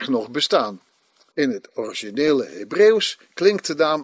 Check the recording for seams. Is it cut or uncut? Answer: cut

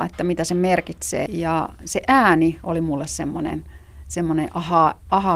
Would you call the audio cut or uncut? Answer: cut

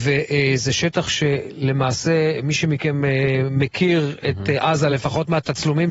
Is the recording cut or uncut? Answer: uncut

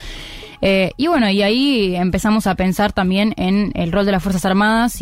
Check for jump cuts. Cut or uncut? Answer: uncut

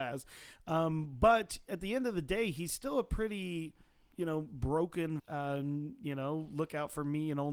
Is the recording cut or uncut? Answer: cut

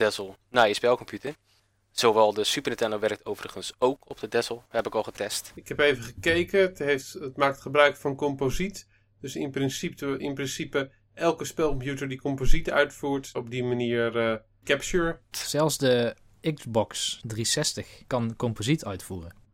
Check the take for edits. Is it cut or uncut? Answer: cut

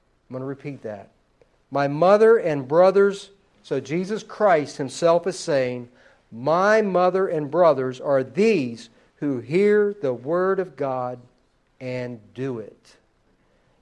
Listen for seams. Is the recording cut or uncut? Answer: uncut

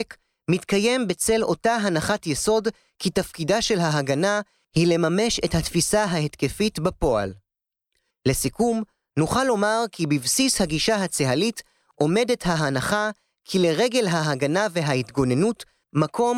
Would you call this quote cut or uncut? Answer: cut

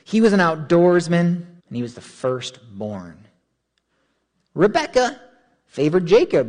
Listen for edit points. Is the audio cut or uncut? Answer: cut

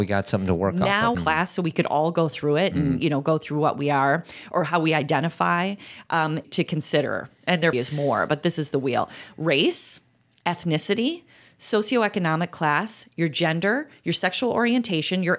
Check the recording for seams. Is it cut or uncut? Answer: cut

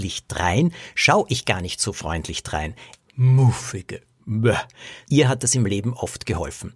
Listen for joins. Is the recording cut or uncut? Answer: cut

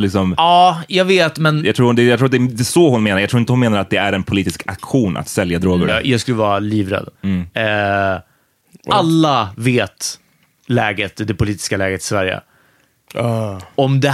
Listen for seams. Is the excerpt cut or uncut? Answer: cut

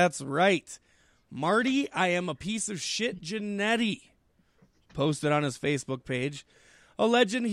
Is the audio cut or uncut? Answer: uncut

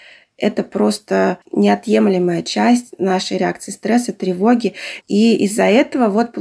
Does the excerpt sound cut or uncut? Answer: cut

